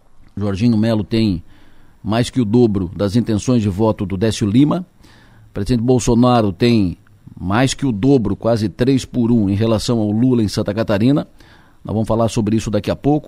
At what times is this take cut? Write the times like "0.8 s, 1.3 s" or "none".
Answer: none